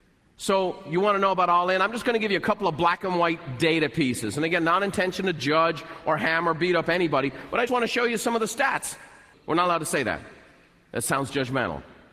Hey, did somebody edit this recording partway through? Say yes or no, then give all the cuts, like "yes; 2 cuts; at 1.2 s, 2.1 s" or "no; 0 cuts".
yes; 2 cuts; at 7.7 s, 9.3 s